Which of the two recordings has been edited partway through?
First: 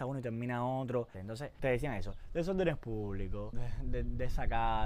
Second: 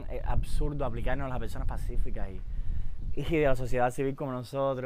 first; 1 cut; at 1.1 s

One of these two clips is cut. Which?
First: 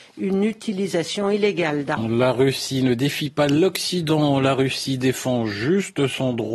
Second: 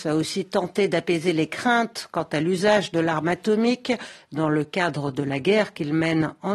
first; 1 cut; at 2.0 s

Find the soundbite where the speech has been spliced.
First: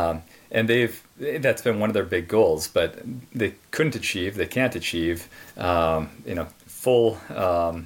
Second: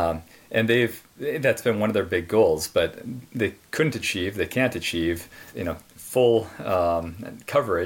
second; 1 cut; at 5.5 s

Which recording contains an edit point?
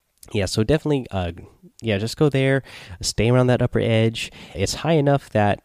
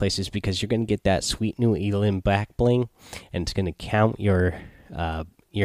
first; 2 cuts; at 1.7 s, 4.5 s

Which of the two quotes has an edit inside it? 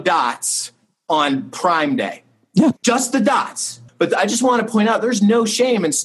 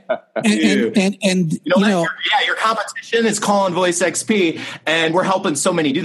first; 2 cuts; at 2.8 s, 3.9 s

